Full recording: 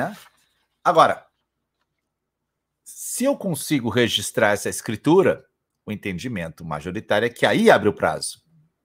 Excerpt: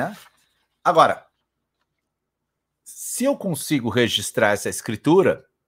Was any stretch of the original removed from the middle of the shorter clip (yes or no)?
no